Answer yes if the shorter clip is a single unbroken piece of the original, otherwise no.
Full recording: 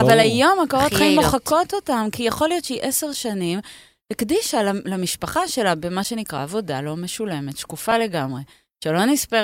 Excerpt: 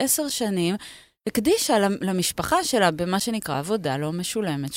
yes